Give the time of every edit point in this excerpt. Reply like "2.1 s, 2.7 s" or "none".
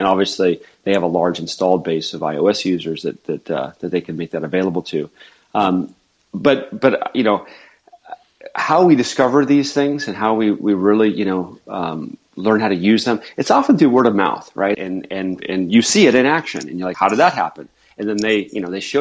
14.7 s, 16.9 s